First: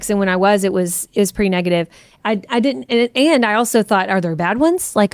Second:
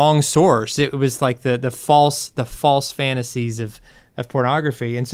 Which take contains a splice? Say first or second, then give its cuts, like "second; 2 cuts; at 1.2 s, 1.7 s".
first; 1 cut; at 2.2 s